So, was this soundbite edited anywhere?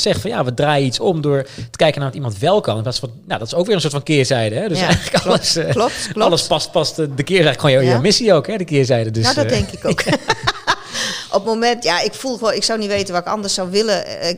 no; 0 cuts

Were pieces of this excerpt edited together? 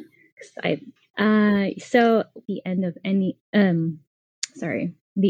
yes; 2 cuts; at 1.0 s, 2.4 s

